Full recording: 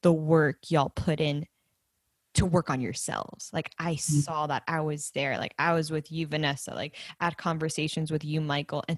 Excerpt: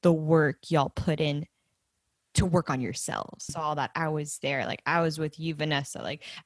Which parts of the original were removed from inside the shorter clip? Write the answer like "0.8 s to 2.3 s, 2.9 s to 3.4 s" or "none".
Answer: 3.5 s to 4.2 s